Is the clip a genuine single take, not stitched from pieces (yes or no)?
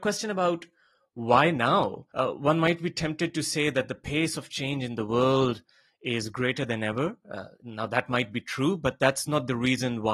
yes